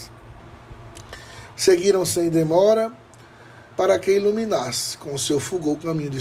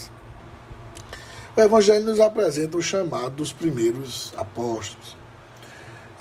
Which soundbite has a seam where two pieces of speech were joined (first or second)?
first